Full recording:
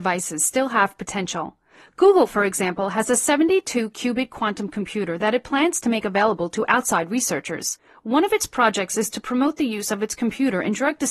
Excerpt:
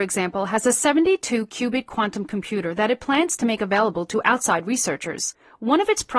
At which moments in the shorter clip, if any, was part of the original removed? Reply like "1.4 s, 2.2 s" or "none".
none

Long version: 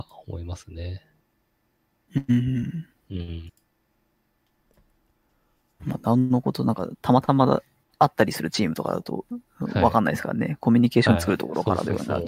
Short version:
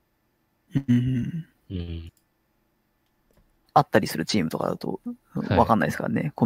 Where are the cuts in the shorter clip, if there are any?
3.6 s

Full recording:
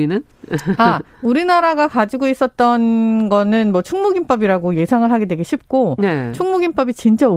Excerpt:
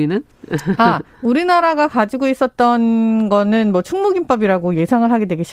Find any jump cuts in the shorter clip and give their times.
none

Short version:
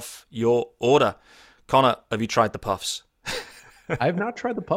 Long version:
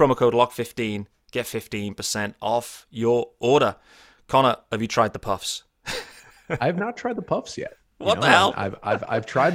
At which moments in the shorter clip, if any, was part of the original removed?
none

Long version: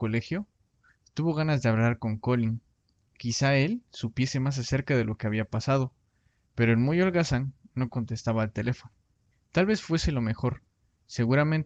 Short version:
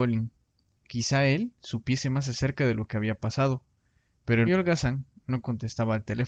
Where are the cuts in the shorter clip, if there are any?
4.5 s

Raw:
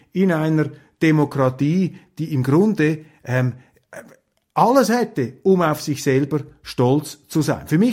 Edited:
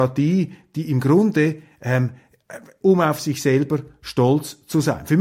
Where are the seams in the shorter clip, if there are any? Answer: 2.8 s

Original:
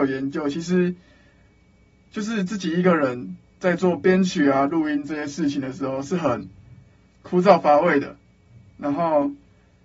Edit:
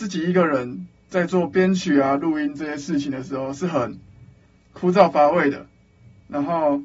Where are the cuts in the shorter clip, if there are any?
none

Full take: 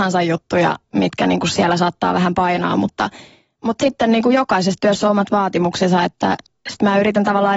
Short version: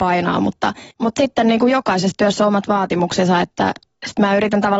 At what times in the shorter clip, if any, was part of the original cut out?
0.9 s

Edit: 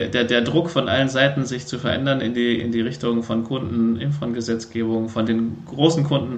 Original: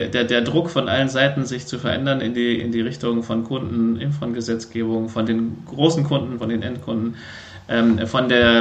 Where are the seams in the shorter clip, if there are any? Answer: none

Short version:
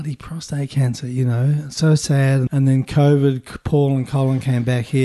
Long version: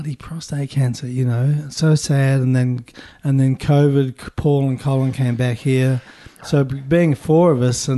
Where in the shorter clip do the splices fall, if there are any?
2.5 s

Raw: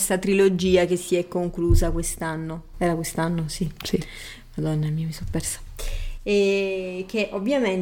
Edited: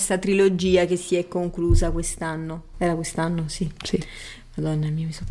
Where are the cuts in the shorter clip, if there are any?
none

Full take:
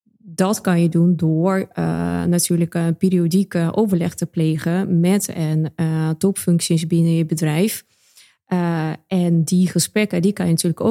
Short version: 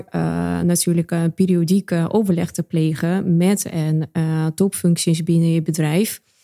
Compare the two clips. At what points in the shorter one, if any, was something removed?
none

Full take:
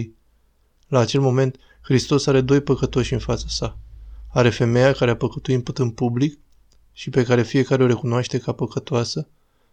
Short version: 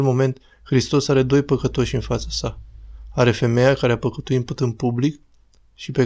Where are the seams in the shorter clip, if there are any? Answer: none

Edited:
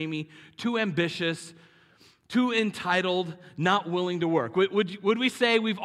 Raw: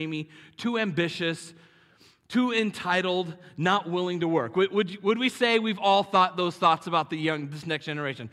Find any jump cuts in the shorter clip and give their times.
none

